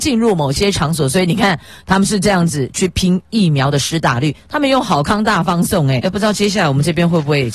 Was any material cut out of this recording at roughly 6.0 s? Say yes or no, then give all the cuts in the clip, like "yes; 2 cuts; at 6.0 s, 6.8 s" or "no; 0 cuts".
yes; 1 cut; at 6.0 s